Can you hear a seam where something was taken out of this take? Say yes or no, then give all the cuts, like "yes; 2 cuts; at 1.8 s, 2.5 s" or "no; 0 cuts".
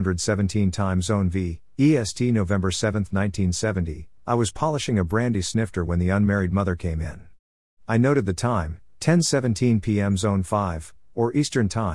yes; 1 cut; at 4.2 s